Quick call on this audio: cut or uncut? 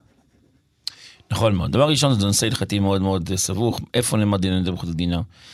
uncut